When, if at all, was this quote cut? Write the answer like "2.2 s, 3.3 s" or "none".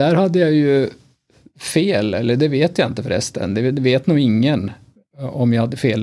none